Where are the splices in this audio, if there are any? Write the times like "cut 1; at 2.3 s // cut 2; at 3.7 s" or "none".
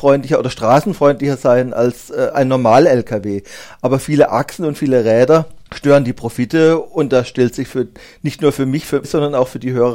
cut 1; at 5.7 s // cut 2; at 9.0 s